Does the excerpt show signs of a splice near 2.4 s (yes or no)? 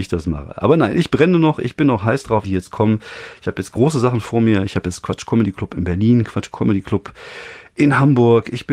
yes